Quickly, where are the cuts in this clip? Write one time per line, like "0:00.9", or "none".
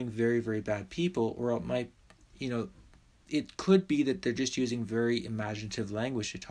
none